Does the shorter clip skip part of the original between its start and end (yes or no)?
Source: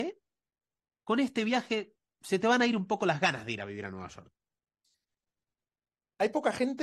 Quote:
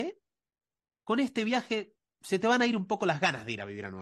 no